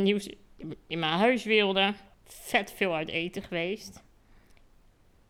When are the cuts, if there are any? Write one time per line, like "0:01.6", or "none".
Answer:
0:02.1